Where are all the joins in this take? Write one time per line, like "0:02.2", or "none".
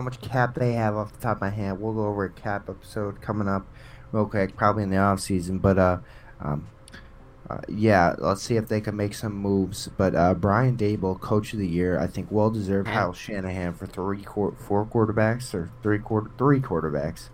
0:12.9